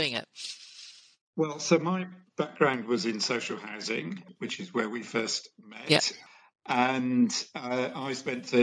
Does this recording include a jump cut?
no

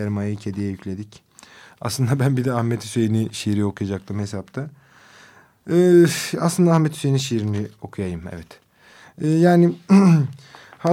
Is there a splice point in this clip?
no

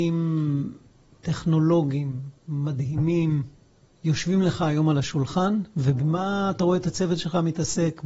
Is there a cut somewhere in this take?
no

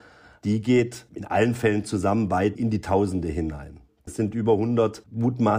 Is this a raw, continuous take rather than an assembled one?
no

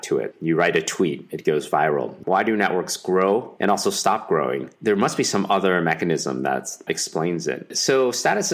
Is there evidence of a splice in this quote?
yes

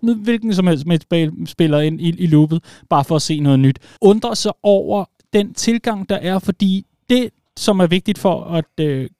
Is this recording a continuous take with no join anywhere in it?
no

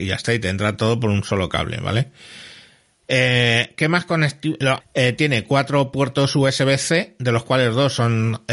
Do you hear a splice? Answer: yes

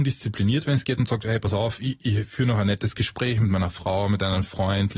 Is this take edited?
no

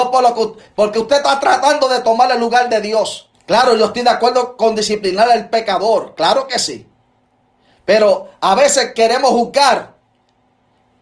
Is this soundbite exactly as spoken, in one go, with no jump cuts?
no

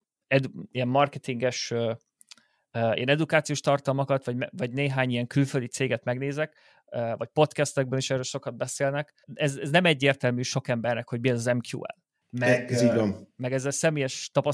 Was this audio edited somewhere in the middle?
yes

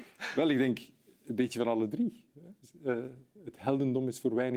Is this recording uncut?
yes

